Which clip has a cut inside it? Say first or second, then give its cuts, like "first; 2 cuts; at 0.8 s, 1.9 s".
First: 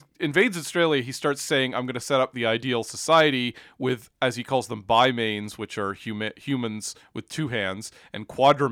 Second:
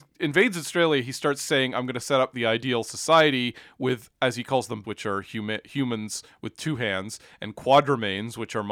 second; 1 cut; at 4.8 s